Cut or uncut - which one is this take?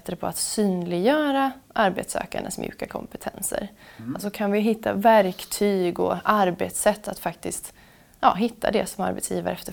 uncut